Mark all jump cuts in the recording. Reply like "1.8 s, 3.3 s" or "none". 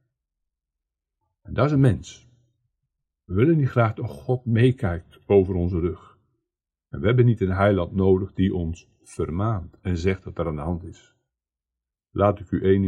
11.9 s